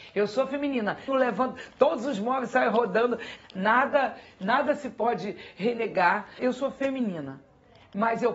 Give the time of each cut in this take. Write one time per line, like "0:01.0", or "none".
0:01.1
0:03.4
0:06.4